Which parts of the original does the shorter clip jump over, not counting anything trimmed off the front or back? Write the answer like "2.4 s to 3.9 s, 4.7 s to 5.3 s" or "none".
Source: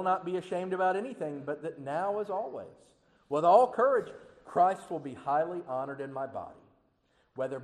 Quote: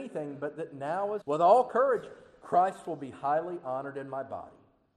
2.3 s to 3.2 s